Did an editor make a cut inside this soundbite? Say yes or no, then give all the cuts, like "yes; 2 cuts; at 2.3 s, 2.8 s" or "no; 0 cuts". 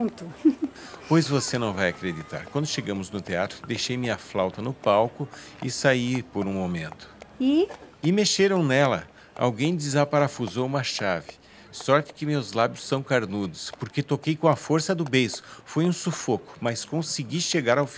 no; 0 cuts